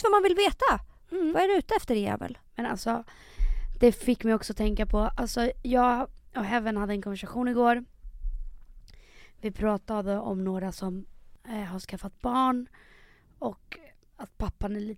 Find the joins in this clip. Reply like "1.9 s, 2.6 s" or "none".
2.5 s